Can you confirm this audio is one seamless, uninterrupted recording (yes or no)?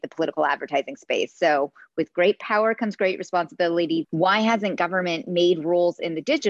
no